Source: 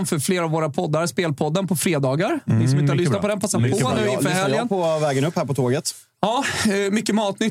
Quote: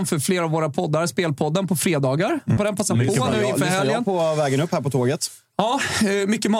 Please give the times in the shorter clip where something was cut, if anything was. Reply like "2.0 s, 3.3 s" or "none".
2.6 s